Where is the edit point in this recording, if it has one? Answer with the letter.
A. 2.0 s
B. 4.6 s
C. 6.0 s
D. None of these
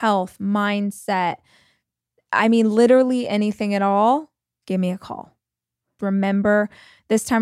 C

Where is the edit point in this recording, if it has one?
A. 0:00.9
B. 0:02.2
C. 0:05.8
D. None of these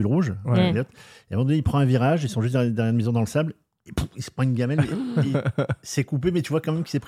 D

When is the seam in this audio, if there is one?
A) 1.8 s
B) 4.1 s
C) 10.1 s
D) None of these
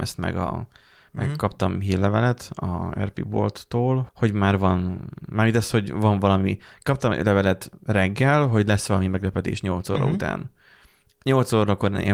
B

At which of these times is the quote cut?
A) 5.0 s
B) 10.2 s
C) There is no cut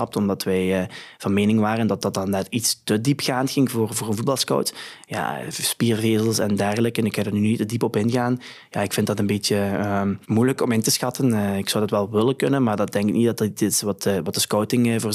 B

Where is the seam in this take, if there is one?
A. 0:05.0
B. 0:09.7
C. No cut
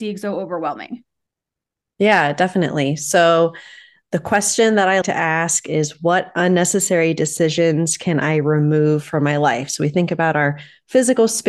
A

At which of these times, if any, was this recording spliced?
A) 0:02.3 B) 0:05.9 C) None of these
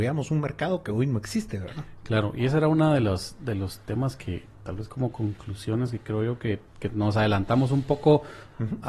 C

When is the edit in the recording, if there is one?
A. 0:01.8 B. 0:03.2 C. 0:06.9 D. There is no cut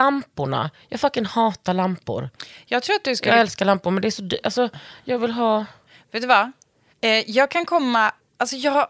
C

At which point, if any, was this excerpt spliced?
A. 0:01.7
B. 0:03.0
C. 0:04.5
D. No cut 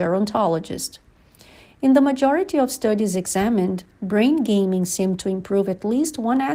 D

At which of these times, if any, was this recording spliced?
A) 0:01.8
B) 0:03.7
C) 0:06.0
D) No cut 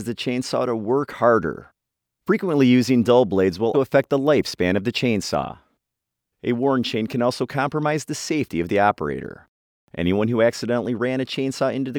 B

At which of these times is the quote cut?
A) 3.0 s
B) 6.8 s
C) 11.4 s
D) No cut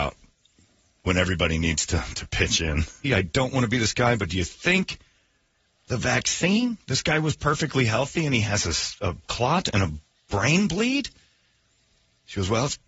A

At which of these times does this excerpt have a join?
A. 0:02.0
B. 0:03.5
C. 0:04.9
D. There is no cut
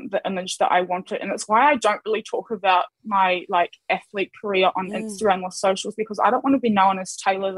D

